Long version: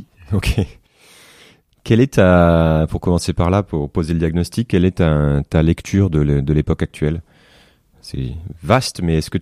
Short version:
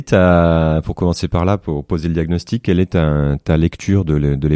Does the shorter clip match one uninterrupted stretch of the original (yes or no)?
yes